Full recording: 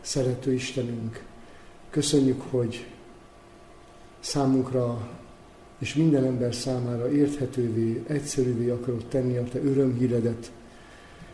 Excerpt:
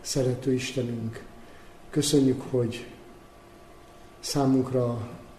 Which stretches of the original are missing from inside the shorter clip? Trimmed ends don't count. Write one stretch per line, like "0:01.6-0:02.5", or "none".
none